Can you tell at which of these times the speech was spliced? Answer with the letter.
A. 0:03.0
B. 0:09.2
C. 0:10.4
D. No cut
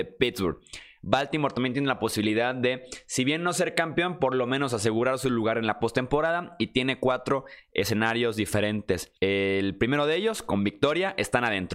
B